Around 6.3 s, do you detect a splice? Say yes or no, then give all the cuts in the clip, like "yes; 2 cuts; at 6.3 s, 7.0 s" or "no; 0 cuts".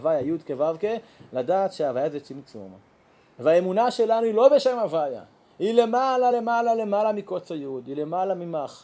no; 0 cuts